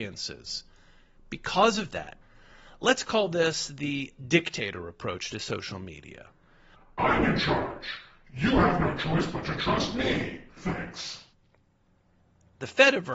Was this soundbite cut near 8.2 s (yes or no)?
no